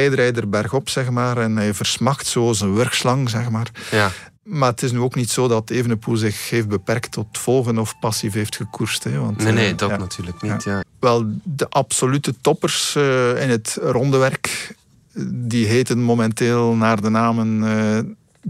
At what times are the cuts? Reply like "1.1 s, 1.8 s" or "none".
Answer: 10.8 s